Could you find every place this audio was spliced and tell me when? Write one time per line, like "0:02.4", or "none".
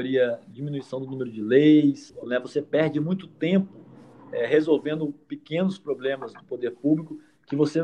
0:02.2